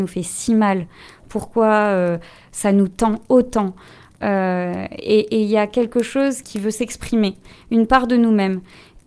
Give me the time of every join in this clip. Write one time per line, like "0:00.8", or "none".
0:04.2
0:06.4